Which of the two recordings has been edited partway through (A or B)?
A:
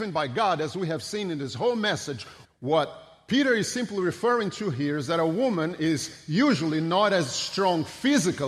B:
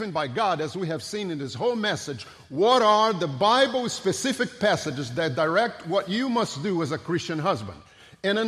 A